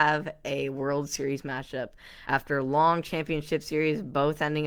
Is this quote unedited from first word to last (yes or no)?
yes